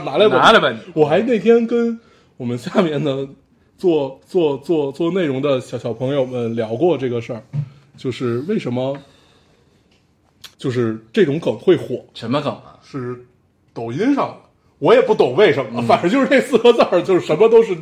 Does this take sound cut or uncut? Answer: cut